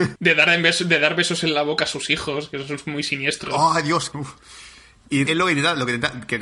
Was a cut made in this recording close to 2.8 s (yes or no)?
no